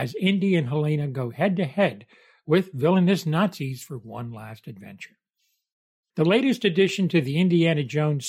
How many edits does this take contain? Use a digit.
1